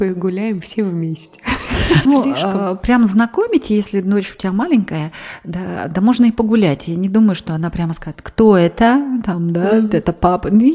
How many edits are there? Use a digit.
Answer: 1